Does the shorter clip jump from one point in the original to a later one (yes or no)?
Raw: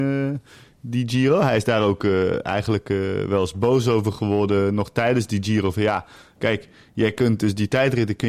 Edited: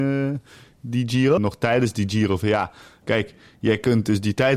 yes